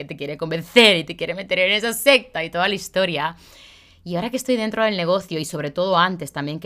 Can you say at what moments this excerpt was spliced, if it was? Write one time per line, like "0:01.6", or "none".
none